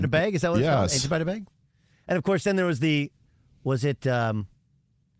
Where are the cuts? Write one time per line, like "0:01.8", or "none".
none